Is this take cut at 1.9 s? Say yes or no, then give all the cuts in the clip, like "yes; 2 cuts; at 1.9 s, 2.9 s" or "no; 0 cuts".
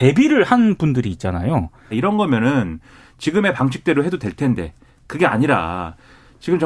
yes; 1 cut; at 1.9 s